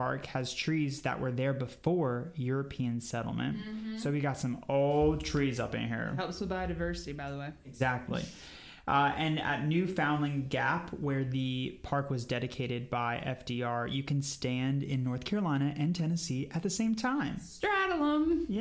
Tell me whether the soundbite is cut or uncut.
uncut